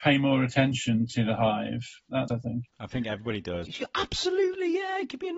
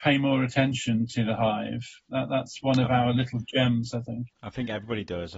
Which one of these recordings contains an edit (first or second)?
first